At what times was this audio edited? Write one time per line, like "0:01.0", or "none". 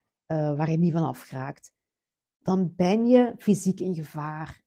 none

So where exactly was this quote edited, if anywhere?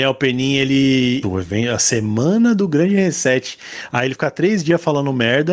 0:01.2

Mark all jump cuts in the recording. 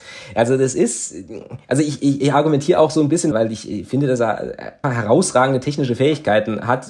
0:03.3
0:04.8

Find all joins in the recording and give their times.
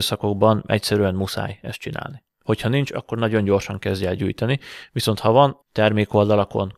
0:02.3
0:05.6

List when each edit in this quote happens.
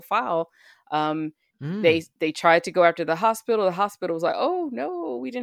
none

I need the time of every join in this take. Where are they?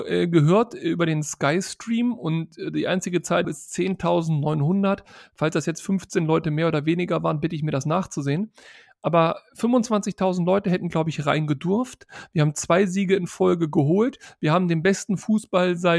0:03.4

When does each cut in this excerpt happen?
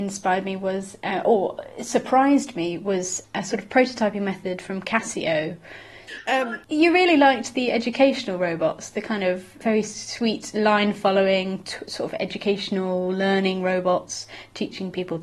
0:06.1

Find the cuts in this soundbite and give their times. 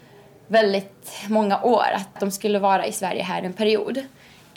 0:02.2

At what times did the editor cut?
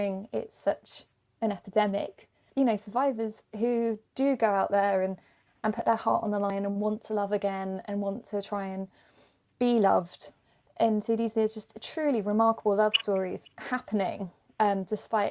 0:02.5

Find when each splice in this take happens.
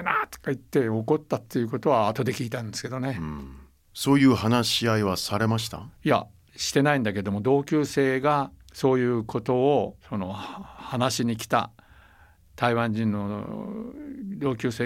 0:03.9
0:08.6
0:10.0

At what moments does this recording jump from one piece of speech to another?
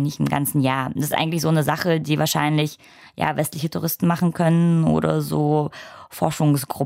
none

